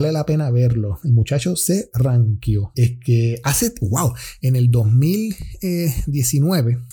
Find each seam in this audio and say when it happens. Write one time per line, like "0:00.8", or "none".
0:02.7
0:03.8